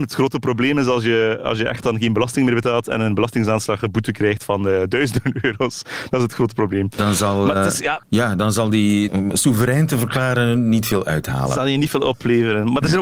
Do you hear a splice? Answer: yes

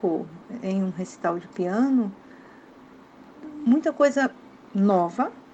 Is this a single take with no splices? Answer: yes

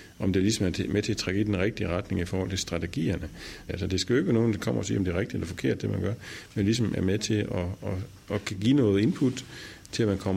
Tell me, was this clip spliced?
yes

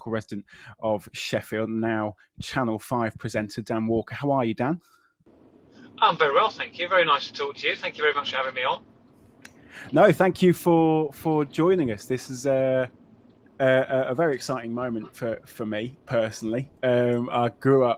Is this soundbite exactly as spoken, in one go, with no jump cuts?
yes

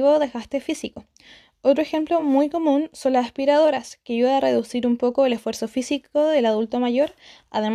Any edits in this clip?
no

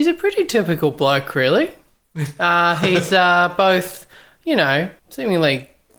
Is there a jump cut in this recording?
yes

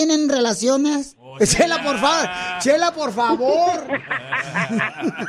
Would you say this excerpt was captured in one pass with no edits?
yes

